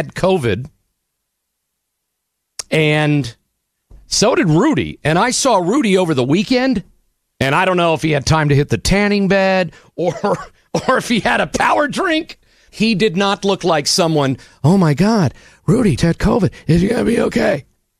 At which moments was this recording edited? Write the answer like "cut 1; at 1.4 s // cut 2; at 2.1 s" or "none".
cut 1; at 7.3 s // cut 2; at 12.7 s // cut 3; at 16.0 s